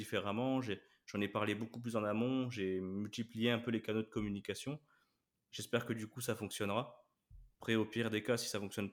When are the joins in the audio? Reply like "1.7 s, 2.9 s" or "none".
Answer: none